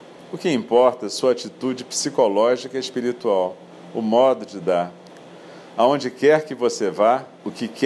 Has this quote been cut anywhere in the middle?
no; 0 cuts

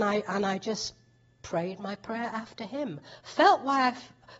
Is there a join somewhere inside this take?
no; 0 cuts

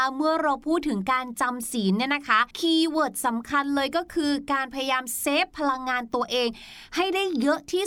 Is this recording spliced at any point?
yes; 1 cut; at 2.5 s

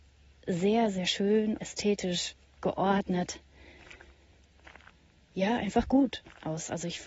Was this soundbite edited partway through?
yes; 1 cut; at 1.6 s

